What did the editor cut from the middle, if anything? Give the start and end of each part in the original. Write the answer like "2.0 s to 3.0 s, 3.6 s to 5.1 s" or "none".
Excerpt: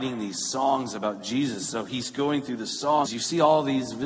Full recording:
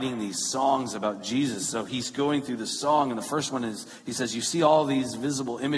3.1 s to 4.3 s